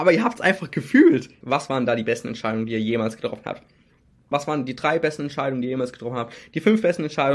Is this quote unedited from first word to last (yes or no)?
no